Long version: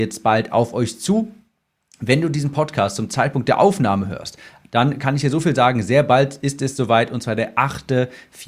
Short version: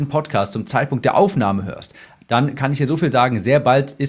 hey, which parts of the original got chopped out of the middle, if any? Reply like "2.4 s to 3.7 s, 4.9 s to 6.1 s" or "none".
none